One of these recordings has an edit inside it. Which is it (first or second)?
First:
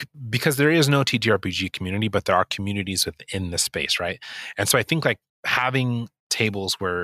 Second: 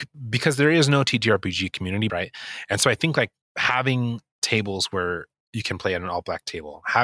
second